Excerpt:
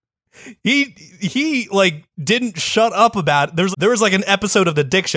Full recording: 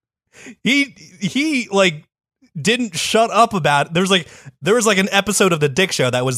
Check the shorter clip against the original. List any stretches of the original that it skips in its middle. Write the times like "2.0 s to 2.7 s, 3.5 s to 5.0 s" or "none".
2.1 s to 2.5 s, 4.1 s to 4.6 s